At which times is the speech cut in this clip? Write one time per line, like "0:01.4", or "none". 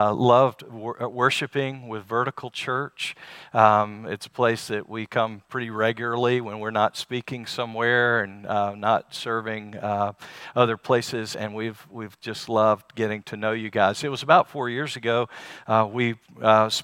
none